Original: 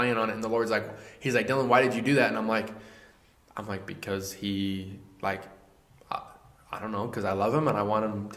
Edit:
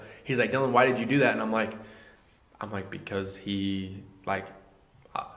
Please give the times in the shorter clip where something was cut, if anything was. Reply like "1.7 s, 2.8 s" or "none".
none